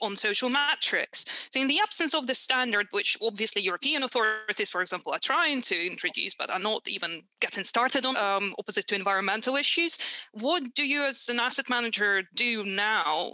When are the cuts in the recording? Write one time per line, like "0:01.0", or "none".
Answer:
0:08.1